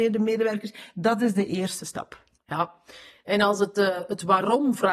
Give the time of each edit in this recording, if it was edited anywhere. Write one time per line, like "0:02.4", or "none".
none